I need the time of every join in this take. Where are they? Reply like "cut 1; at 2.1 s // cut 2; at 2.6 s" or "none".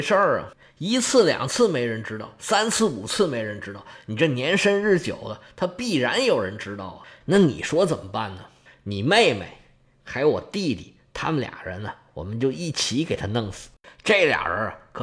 cut 1; at 7.2 s // cut 2; at 8.7 s